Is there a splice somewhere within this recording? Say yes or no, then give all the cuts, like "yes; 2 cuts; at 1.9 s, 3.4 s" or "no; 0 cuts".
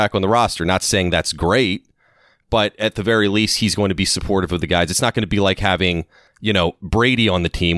no; 0 cuts